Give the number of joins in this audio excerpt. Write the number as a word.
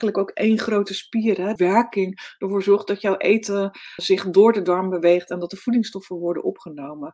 two